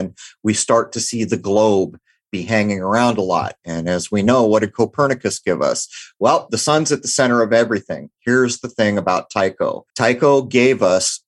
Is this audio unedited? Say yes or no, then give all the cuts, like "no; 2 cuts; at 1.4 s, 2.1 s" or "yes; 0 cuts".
no; 1 cut; at 9.9 s